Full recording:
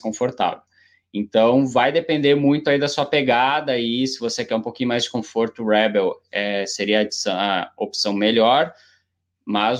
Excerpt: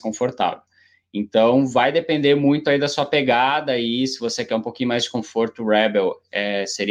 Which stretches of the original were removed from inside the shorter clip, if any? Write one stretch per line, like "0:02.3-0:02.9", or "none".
none